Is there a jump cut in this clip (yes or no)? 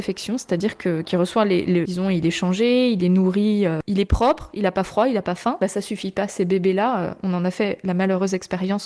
yes